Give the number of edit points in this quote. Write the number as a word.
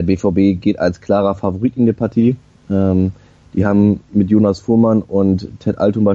zero